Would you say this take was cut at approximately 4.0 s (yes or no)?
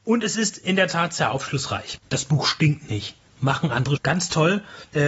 yes